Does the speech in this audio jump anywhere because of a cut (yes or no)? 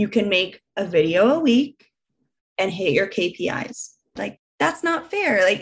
yes